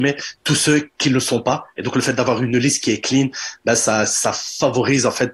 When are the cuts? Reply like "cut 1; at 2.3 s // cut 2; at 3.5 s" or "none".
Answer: none